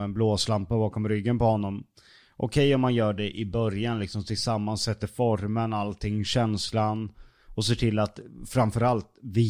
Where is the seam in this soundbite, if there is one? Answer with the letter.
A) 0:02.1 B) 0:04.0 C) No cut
C